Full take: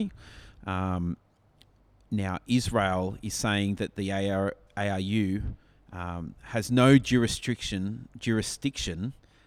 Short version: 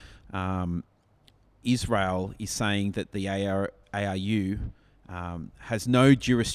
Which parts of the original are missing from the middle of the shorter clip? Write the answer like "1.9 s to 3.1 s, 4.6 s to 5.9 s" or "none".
1.9 s to 2.4 s